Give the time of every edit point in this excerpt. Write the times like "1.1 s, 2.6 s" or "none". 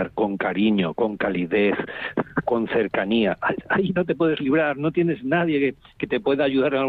none